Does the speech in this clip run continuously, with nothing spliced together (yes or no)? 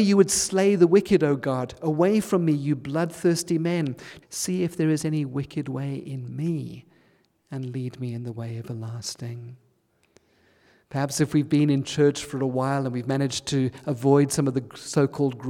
no